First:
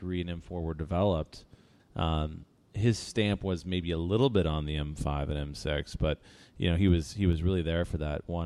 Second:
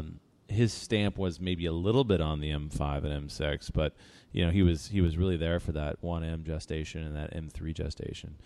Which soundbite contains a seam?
first; 1 cut; at 1.8 s

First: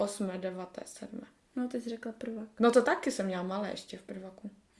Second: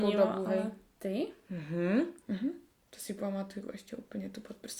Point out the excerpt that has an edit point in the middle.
second; 1 cut; at 2.2 s

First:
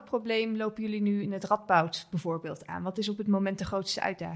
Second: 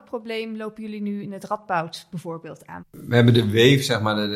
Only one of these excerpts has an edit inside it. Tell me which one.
second; 1 cut; at 2.8 s

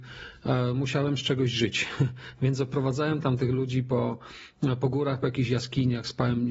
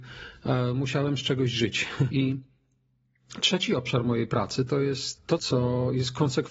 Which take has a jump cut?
second; 2 cuts; at 2.1 s, 5.4 s

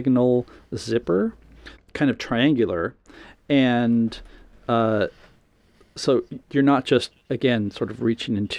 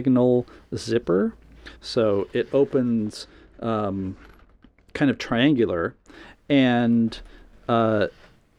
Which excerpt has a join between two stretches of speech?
first; 1 cut; at 1.8 s

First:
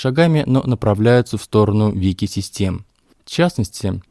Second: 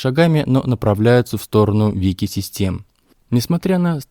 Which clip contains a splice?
second; 1 cut; at 3.2 s

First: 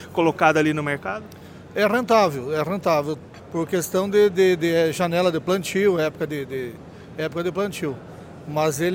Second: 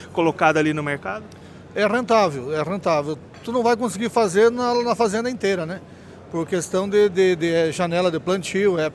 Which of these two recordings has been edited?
first; 1 cut; at 3.4 s

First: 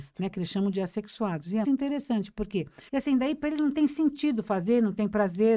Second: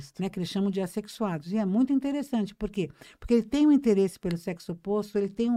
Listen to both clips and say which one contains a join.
first; 2 cuts; at 1.6 s, 2.9 s

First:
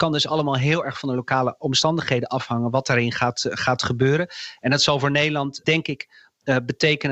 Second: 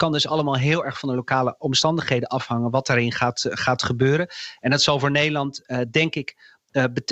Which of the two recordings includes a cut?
first; 1 cut; at 5.6 s

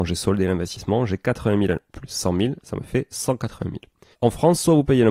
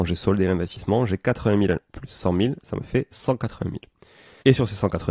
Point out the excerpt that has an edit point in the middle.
first; 1 cut; at 4.1 s

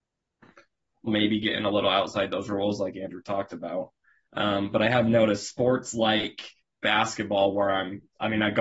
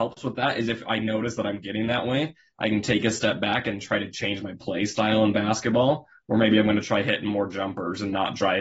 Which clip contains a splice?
first; 1 cut; at 1.1 s

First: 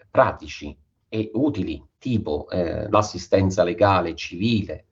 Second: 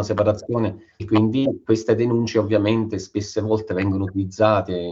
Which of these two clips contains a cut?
second; 1 cut; at 1.0 s

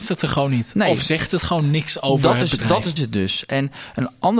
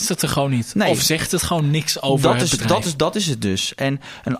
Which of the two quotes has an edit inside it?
first; 1 cut; at 3.0 s

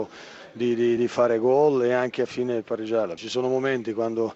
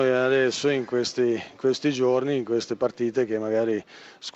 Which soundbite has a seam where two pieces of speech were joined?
first; 2 cuts; at 1.0 s, 3.2 s

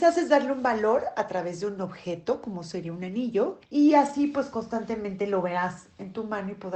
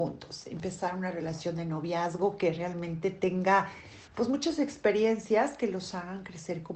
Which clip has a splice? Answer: first; 1 cut; at 3.6 s

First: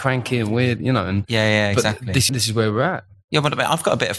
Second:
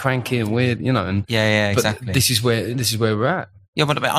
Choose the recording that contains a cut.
first; 1 cut; at 2.3 s

